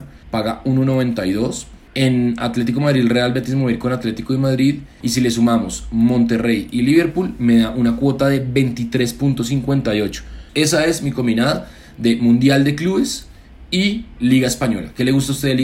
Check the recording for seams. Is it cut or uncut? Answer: cut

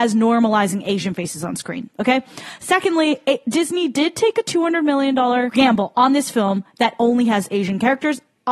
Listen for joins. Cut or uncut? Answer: uncut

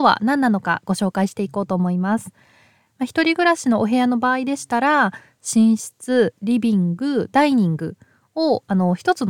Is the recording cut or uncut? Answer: cut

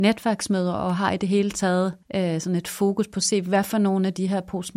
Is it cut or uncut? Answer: cut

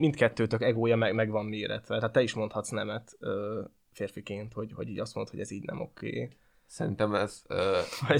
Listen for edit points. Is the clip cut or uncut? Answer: uncut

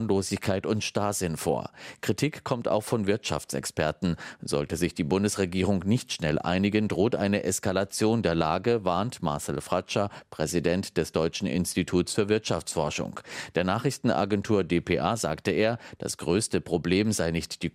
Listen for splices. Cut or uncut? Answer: uncut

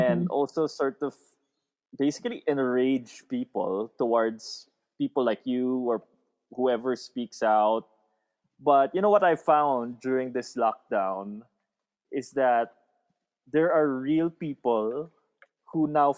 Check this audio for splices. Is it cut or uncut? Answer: uncut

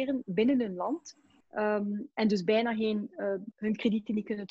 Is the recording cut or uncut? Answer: cut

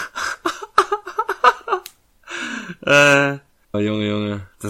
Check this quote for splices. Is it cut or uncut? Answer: cut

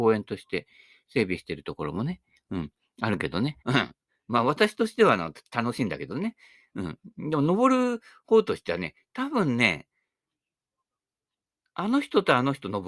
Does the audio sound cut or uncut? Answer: cut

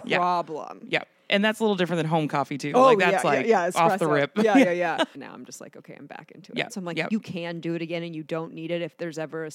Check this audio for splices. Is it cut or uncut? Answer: cut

